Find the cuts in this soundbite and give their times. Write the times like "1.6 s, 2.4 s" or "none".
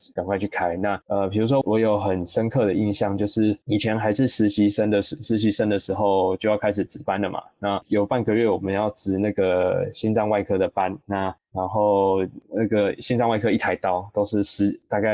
1.6 s